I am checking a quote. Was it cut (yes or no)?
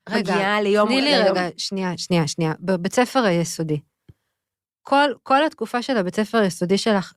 no